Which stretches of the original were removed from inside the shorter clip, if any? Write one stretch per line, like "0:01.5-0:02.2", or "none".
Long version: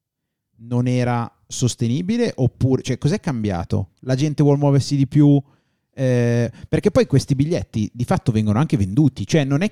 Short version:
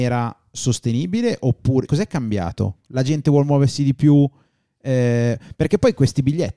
0:02.8-0:03.0